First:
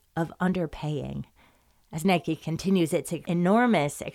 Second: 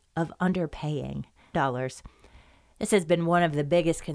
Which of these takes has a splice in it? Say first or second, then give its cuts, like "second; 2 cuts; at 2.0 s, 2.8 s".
second; 1 cut; at 1.5 s